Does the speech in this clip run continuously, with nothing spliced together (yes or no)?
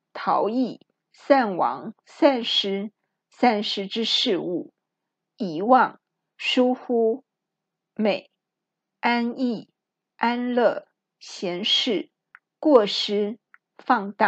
yes